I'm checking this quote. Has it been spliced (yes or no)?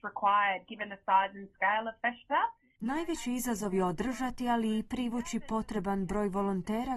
no